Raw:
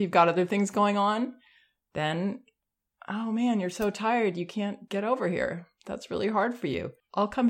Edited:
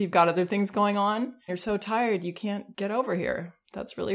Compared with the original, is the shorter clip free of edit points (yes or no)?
no